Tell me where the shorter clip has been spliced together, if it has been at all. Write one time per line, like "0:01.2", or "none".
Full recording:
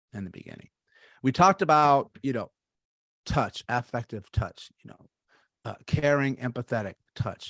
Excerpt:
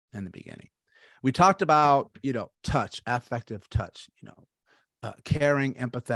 0:02.5

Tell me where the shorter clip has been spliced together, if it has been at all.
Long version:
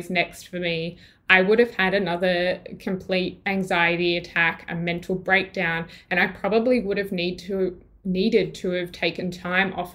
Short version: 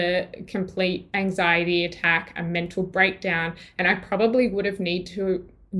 none

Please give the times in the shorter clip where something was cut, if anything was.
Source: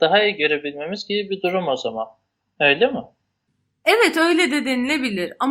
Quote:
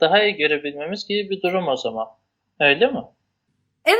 none

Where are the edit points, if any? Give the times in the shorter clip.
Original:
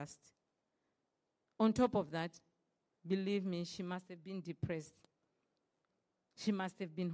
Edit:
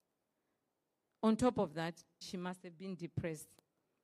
0:02.2

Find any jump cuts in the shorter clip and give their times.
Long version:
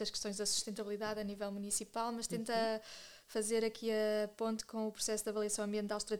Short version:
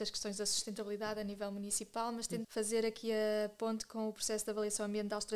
0:02.4

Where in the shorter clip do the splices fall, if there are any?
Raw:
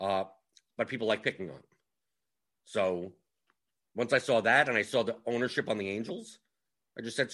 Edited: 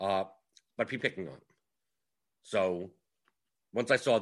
0:01.0

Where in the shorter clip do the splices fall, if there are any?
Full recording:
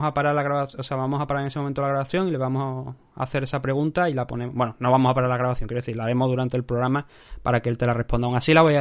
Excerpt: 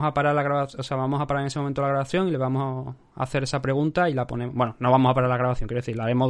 none

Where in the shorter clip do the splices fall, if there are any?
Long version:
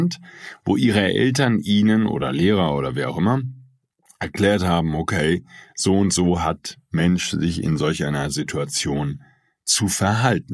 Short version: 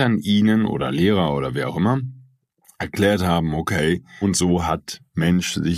0:04.2

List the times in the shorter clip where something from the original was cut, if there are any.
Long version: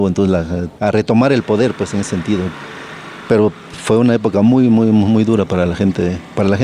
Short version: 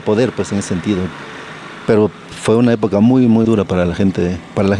0:03.4

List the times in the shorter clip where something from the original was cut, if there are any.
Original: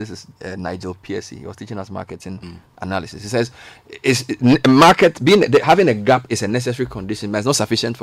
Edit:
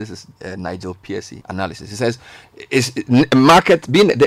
0:01.4

